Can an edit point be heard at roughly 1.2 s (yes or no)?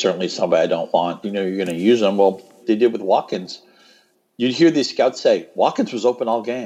yes